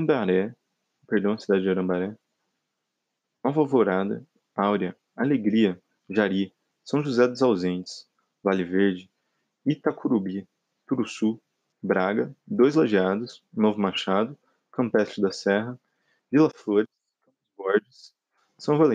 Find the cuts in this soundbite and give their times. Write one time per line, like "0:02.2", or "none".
0:04.4
0:11.7